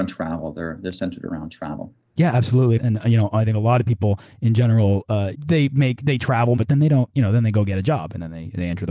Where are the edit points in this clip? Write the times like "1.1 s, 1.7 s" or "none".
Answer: 2.8 s, 5.3 s, 6.6 s